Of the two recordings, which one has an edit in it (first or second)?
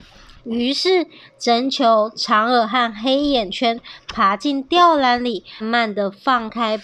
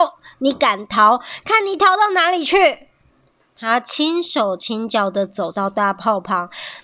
first